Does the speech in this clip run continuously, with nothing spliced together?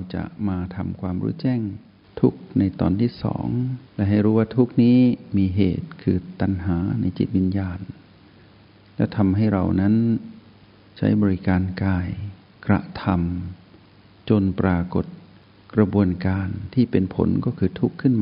no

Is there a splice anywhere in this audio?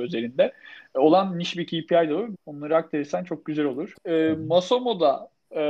yes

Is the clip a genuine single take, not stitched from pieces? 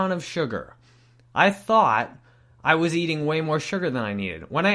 yes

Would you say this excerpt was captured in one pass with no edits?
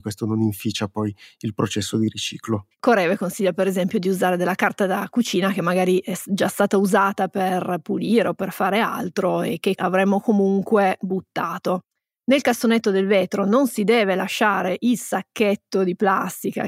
no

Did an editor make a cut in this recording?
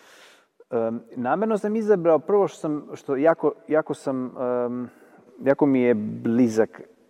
no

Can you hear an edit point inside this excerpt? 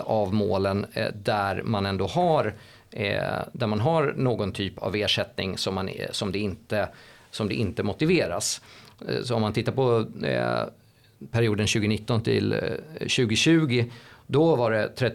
no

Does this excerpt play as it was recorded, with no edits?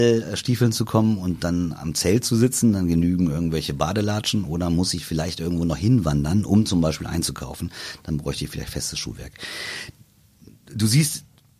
yes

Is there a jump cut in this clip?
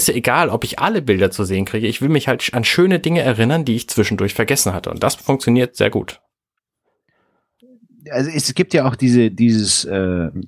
no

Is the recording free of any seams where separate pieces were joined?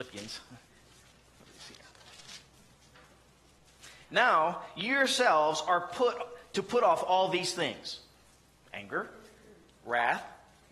yes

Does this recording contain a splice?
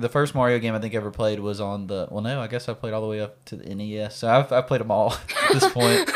no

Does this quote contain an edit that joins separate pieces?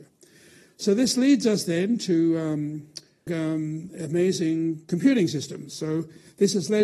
yes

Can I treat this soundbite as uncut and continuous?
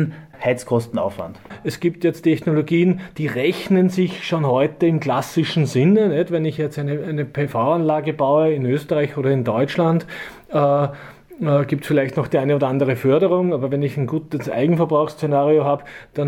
yes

